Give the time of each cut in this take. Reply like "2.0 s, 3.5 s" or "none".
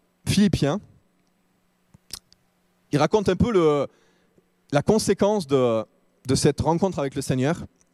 none